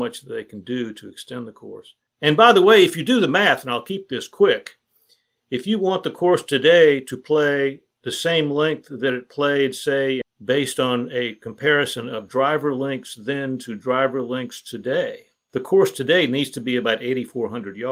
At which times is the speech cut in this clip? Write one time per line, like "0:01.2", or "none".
0:10.2